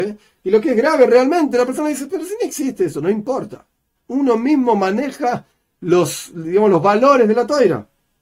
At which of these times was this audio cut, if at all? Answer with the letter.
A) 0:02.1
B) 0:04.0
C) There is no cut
B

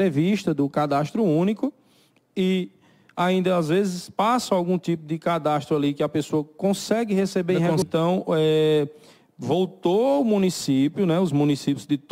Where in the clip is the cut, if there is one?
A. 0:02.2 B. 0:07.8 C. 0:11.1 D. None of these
B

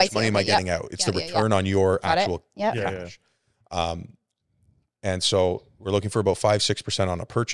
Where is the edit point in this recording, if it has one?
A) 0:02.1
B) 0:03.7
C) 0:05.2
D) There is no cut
D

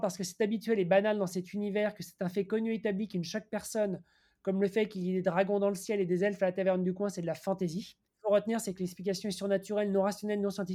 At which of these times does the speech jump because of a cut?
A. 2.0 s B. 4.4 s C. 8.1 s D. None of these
C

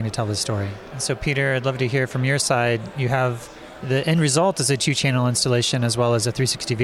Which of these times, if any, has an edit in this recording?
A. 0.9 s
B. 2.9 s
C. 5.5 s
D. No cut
A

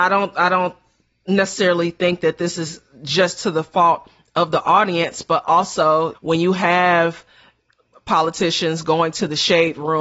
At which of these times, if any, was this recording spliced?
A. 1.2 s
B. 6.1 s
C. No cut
B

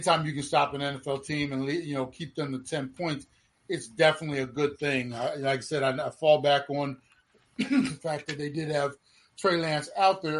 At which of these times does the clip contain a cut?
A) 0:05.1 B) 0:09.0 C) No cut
C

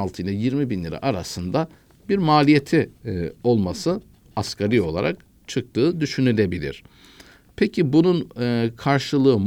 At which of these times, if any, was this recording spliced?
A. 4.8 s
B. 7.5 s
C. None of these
C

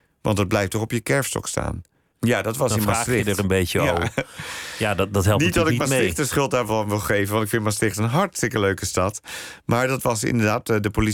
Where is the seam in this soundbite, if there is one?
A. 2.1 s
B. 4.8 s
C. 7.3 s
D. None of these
A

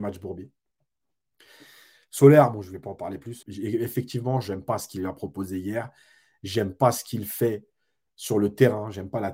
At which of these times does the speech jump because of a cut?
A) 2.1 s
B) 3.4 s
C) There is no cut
B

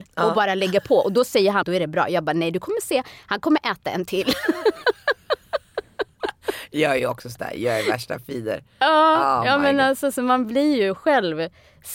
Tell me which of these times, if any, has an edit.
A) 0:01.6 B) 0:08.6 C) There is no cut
A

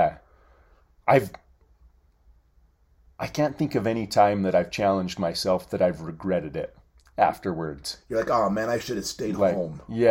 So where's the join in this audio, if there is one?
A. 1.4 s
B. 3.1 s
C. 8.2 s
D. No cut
D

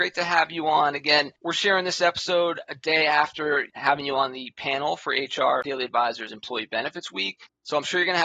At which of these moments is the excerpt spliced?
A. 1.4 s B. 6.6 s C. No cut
A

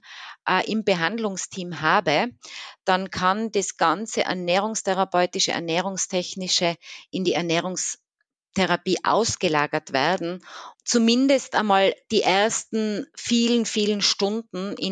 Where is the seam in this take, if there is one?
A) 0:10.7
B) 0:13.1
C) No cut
A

